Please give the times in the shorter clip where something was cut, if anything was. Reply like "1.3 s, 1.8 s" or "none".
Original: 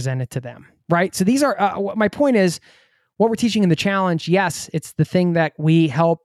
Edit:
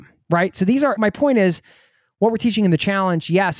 1.0 s